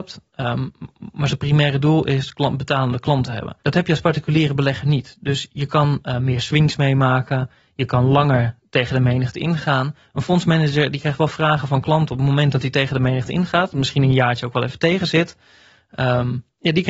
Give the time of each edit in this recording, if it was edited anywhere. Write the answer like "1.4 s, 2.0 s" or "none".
3.6 s